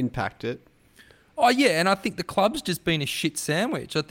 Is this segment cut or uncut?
uncut